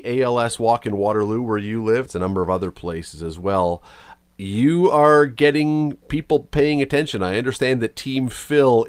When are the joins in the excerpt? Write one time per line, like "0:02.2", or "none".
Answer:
0:02.1